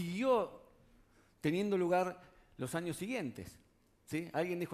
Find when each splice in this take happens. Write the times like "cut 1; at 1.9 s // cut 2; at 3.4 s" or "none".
none